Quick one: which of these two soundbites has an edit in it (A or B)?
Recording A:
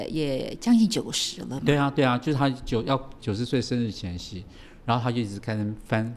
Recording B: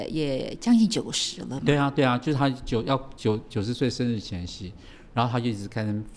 A